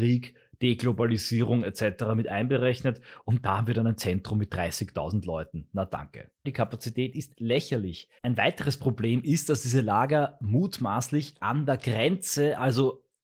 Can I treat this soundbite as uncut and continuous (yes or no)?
no